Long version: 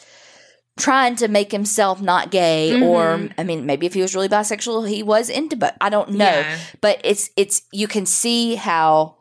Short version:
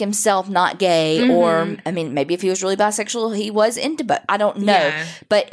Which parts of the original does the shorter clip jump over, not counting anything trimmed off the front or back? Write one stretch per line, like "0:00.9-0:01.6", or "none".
none